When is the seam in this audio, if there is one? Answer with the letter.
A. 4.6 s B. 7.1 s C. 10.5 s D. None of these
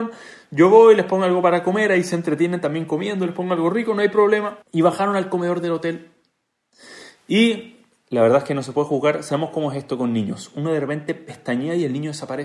A